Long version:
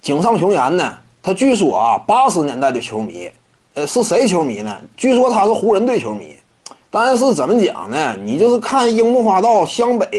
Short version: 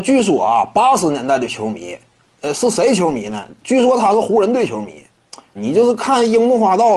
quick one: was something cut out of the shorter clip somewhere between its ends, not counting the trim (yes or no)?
yes